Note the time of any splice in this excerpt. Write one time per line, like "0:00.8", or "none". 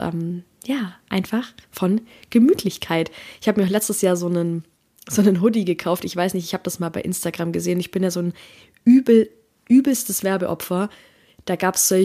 none